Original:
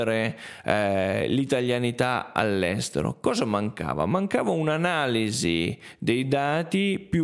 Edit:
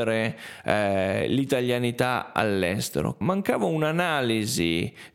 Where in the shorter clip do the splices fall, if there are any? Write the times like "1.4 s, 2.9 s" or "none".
3.2 s